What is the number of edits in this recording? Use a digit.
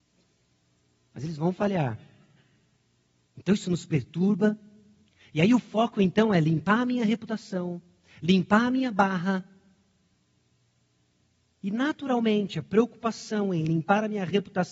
1